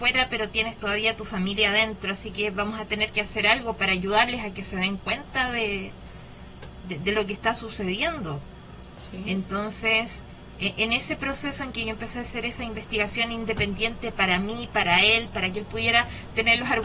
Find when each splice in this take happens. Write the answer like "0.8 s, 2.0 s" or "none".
none